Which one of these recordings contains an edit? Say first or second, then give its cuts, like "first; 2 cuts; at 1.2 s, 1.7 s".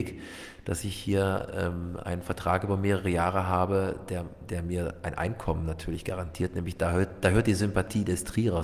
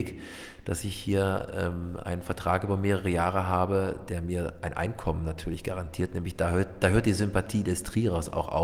second; 1 cut; at 4.1 s